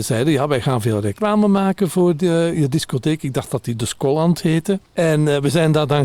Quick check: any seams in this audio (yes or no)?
yes